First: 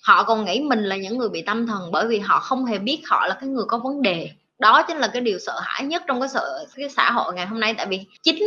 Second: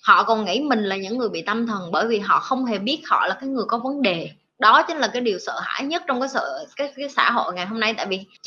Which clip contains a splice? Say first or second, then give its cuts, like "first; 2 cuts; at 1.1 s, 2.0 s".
first; 1 cut; at 6.7 s